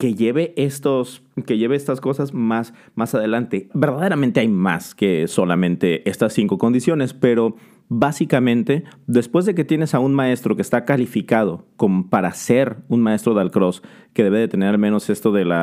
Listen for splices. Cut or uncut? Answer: cut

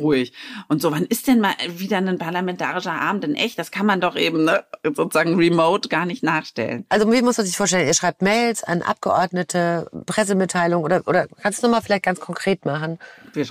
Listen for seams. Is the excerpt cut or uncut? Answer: uncut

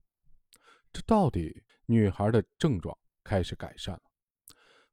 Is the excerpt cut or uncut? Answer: cut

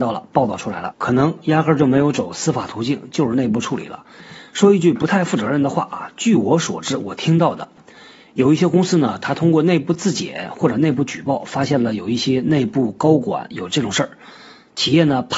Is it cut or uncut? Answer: cut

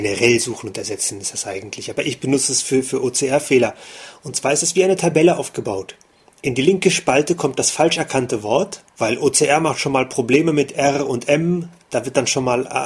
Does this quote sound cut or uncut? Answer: cut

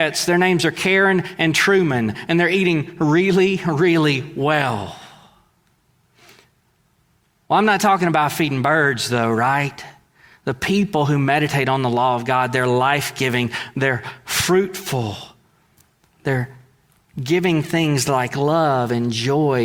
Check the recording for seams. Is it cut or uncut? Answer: uncut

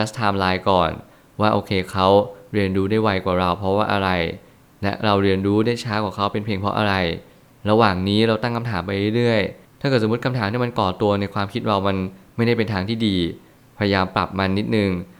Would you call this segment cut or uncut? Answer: uncut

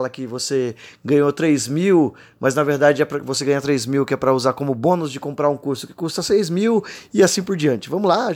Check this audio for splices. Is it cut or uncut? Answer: uncut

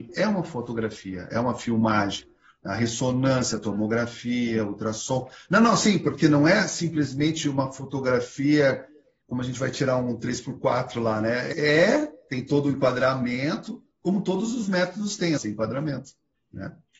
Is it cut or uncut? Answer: cut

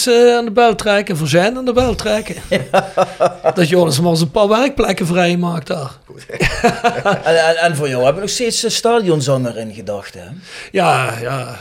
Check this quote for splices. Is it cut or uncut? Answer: uncut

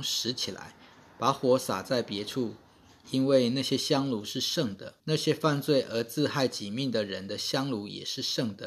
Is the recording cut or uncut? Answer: cut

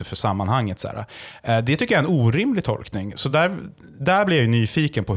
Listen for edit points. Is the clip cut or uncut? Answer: uncut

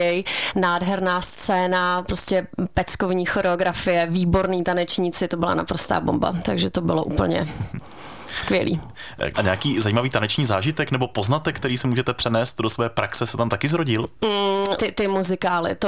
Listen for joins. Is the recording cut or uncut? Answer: cut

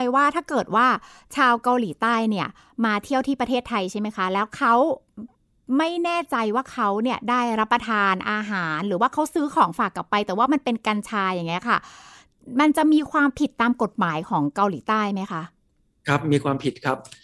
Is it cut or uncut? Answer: uncut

